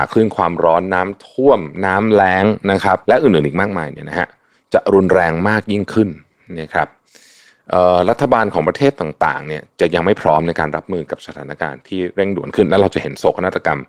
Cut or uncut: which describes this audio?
cut